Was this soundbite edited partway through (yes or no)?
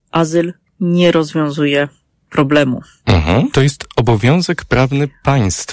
yes